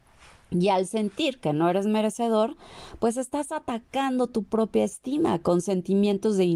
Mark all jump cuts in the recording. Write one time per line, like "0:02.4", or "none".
none